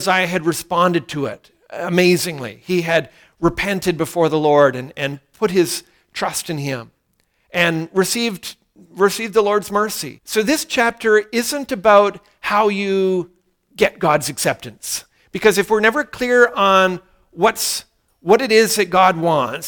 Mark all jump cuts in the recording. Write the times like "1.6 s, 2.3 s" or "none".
10.2 s, 15.2 s